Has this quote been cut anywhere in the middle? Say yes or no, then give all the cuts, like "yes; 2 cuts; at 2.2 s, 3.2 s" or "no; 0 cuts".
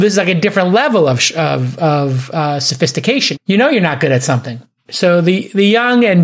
yes; 2 cuts; at 3.3 s, 4.9 s